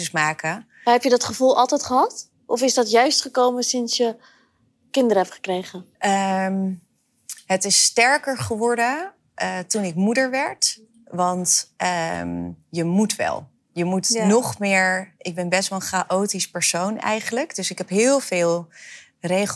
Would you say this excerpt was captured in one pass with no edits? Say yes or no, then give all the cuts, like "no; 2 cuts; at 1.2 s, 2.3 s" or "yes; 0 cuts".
no; 1 cut; at 5.9 s